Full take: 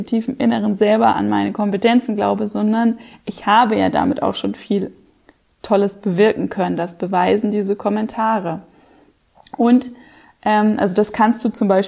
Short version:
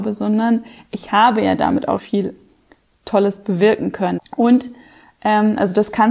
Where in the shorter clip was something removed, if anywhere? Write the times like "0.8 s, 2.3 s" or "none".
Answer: 2.0 s, 4.2 s